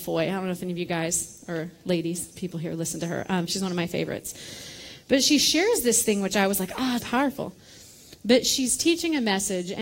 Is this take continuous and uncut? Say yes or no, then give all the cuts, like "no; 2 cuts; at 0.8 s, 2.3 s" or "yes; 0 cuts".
no; 1 cut; at 7.0 s